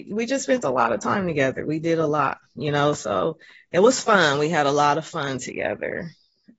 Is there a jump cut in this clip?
no; 0 cuts

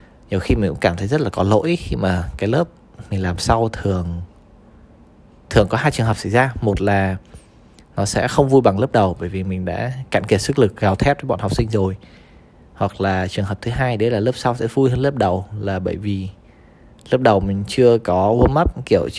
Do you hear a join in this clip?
no; 0 cuts

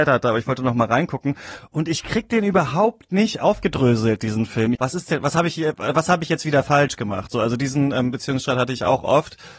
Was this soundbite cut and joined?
yes; 1 cut; at 4.8 s

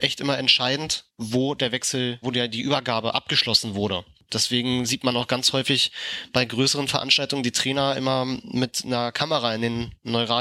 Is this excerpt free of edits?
no; 1 cut; at 2.2 s

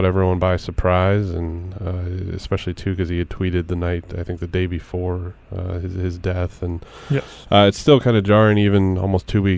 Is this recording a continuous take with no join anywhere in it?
yes; 0 cuts

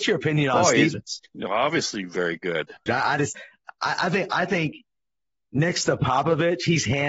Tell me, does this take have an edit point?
yes; 1 cut; at 2.9 s

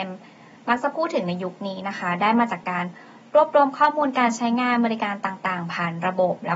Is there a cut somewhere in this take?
no; 0 cuts

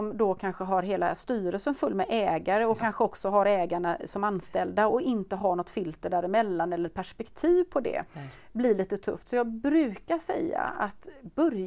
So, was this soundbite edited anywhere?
no; 0 cuts

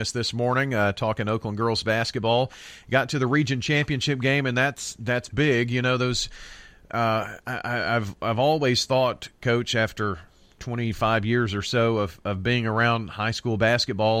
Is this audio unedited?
yes; 0 cuts

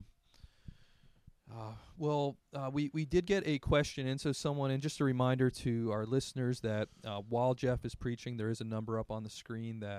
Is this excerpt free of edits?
yes; 0 cuts

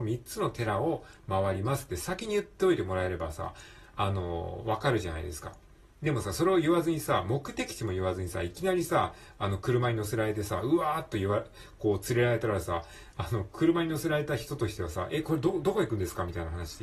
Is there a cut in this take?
no; 0 cuts

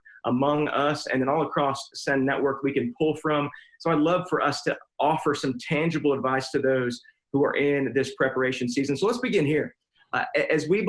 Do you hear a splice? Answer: no; 0 cuts

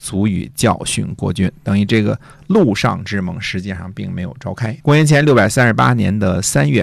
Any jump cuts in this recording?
yes; 1 cut; at 4.8 s

